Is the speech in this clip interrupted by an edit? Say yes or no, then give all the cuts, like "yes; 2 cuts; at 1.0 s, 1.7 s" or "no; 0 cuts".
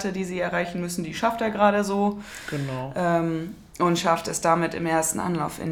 no; 0 cuts